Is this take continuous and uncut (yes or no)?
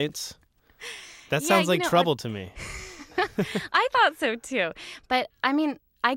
yes